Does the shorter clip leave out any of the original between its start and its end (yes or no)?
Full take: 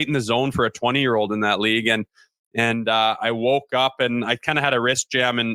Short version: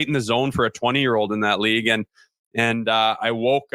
no